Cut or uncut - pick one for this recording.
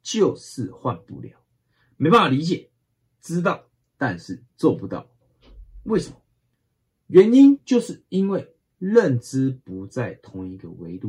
uncut